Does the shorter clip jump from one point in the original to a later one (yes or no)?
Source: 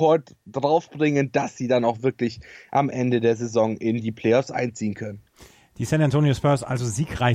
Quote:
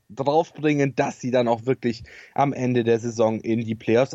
no